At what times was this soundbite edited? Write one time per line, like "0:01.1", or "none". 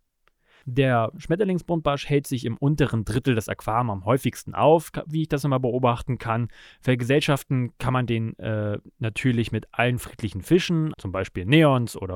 0:10.9